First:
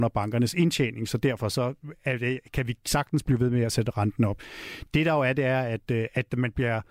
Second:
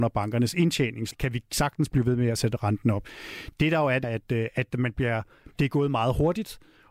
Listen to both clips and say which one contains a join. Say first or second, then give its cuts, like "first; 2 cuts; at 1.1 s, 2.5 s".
second; 2 cuts; at 1.1 s, 4.0 s